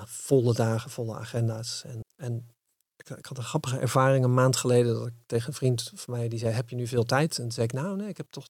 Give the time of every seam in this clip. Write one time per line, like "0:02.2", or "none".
0:02.0